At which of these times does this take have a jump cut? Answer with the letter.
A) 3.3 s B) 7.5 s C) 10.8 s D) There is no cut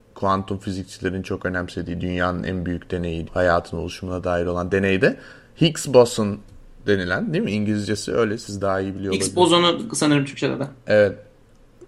A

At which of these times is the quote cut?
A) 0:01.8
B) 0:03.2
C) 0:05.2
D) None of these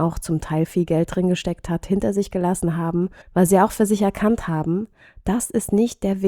B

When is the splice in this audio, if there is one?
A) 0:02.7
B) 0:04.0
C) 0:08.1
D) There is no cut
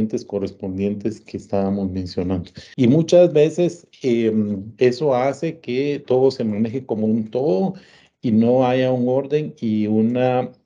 A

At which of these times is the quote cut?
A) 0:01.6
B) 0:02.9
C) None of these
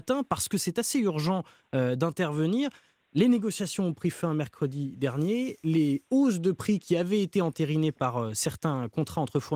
C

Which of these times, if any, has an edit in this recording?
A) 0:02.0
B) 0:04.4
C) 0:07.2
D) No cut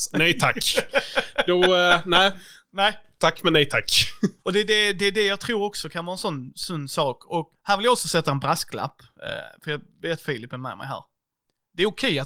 B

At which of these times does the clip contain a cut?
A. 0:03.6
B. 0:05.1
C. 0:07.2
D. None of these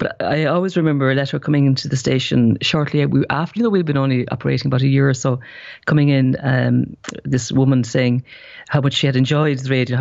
A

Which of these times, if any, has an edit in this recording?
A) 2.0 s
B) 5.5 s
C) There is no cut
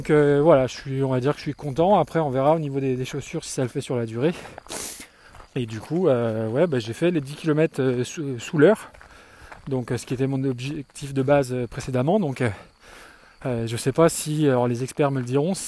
B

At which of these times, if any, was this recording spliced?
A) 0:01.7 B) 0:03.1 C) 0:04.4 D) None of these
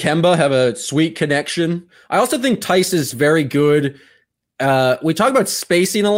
B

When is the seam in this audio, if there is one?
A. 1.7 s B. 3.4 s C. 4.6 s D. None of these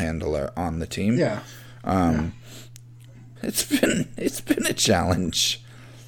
B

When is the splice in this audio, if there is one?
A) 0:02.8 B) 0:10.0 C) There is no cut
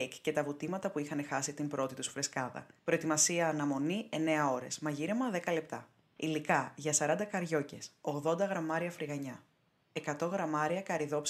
A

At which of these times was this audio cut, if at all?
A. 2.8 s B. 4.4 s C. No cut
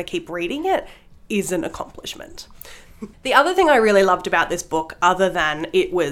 A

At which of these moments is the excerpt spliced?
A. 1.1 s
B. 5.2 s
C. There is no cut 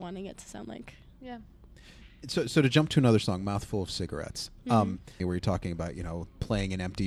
B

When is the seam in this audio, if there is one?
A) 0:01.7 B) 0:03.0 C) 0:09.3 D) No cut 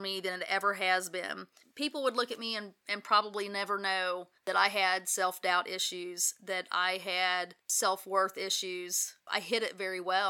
C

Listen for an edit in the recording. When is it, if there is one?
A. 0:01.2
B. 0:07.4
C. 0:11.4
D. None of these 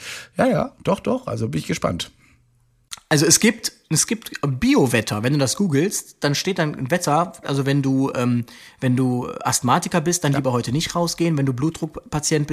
B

